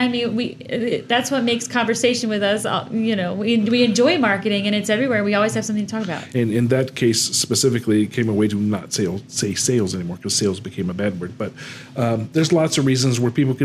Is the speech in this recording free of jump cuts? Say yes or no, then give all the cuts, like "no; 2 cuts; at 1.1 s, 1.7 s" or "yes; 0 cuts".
no; 1 cut; at 6.3 s